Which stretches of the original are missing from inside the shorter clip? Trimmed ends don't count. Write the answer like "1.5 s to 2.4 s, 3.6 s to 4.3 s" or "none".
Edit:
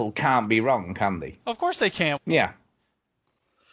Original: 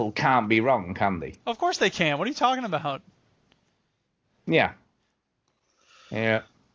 2.2 s to 4.4 s